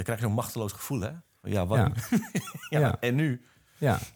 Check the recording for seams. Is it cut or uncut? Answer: uncut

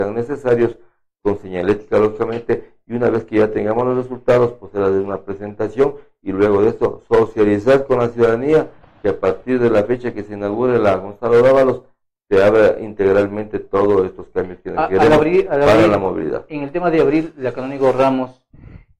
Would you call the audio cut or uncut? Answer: uncut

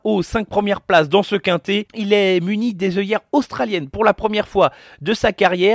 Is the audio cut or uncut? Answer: cut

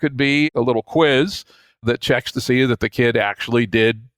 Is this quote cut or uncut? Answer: uncut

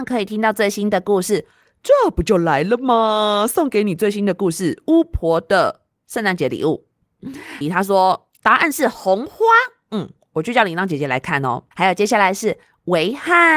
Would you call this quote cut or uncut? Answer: cut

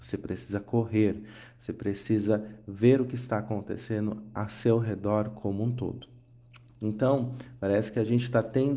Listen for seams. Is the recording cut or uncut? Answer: cut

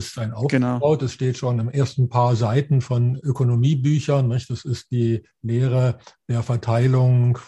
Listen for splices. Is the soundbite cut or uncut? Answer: uncut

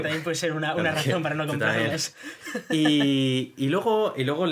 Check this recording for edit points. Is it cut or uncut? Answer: uncut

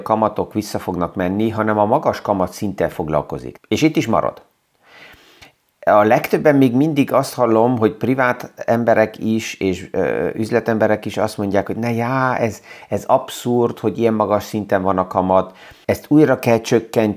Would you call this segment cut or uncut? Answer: cut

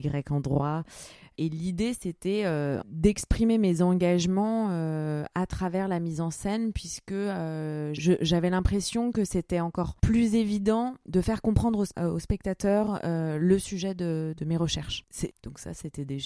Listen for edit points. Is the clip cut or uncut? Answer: cut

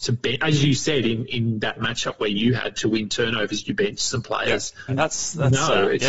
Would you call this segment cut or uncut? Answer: cut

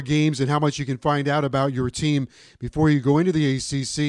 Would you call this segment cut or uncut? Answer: uncut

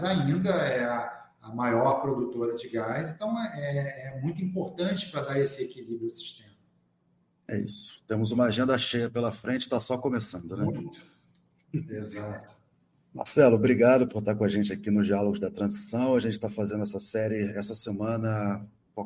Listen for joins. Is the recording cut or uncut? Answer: uncut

